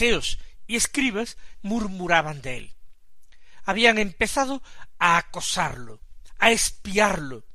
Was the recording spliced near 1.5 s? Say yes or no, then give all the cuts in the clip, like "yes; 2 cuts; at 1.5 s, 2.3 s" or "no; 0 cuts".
yes; 1 cut; at 1.5 s